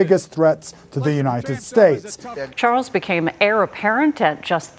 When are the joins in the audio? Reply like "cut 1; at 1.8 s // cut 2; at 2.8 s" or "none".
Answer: cut 1; at 2.5 s